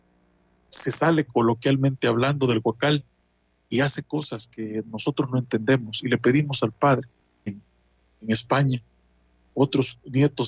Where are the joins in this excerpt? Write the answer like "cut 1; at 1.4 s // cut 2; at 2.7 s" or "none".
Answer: cut 1; at 1.3 s // cut 2; at 7.5 s